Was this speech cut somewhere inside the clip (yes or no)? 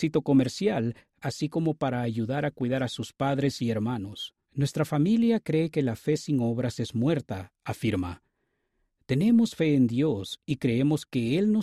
yes